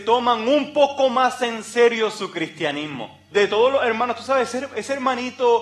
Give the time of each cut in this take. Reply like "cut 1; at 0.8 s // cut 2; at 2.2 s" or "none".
cut 1; at 3.3 s